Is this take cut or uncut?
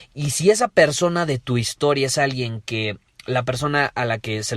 uncut